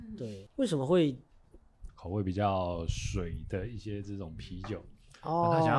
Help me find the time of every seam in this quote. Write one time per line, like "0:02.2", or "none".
0:01.9